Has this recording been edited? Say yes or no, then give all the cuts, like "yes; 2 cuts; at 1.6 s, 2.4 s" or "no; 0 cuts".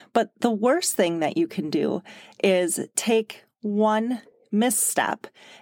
no; 0 cuts